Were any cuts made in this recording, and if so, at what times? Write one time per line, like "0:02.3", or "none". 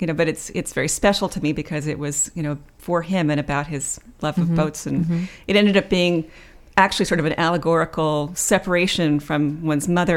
none